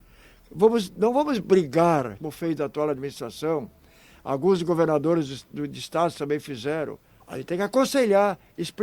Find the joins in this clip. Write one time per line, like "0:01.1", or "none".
0:02.2
0:07.2

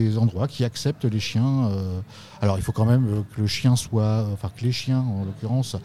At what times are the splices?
none

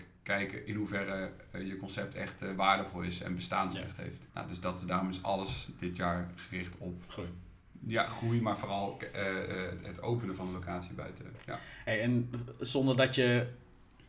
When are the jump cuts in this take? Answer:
0:04.3

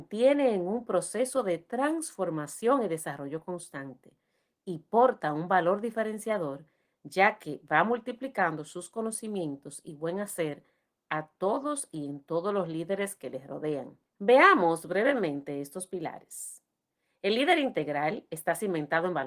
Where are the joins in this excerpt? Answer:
0:14.1

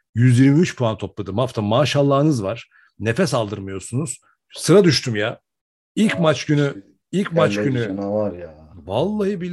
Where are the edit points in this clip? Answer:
none

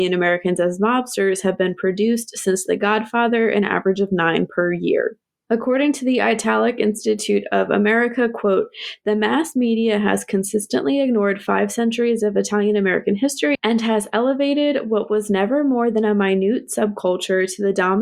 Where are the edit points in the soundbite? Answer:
none

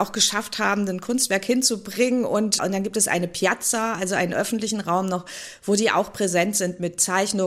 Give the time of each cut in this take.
0:02.6

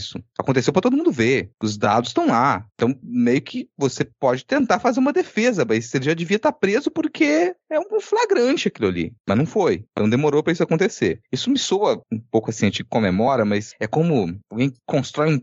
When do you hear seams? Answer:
0:12.0

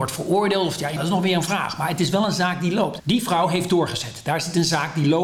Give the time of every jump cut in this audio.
0:01.0
0:03.0

